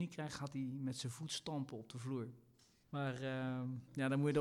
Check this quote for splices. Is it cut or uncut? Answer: cut